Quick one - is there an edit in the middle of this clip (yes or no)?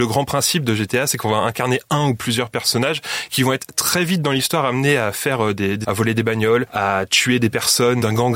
yes